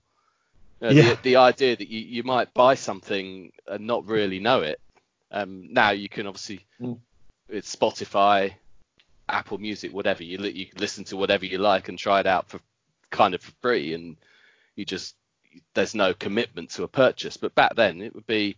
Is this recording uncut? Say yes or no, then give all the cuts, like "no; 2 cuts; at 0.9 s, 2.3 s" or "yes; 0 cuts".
yes; 0 cuts